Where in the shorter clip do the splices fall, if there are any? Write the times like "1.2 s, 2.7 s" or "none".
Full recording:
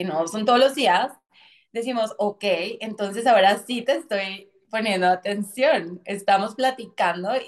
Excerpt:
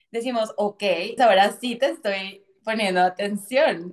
1.2 s